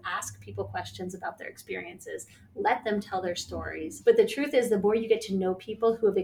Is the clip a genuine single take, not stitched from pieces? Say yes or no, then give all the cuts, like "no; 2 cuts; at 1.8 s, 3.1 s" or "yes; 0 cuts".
no; 1 cut; at 4.0 s